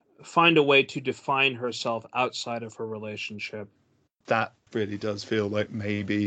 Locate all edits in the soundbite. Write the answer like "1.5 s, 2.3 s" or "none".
4.1 s